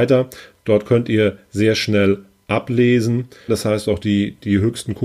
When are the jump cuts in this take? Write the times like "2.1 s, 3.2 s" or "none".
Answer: 3.5 s